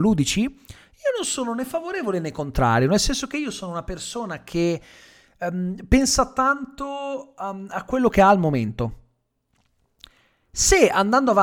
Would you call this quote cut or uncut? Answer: uncut